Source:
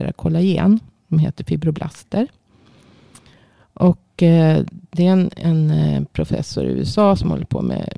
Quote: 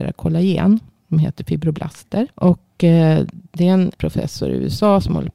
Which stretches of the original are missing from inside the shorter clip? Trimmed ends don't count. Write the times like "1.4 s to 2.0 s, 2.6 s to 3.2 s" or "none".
2.3 s to 3.7 s, 5.3 s to 6.1 s